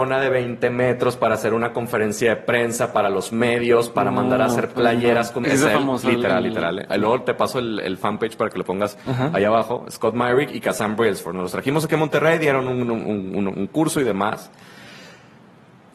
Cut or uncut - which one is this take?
cut